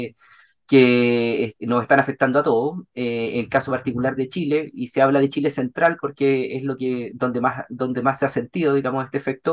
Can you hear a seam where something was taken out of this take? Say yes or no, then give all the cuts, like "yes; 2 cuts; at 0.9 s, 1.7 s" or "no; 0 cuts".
no; 0 cuts